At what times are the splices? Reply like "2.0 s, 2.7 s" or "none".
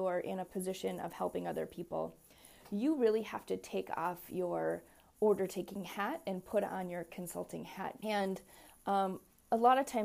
8.0 s